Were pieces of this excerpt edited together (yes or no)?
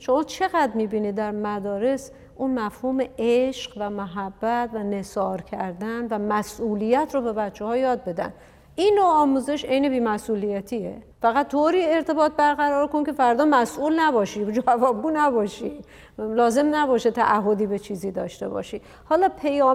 yes